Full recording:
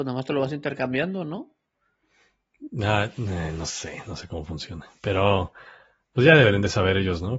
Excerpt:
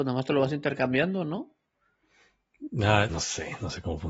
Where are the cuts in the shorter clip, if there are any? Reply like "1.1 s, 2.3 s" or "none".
3.1 s